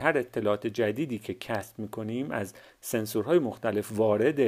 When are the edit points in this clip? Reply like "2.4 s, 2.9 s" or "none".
none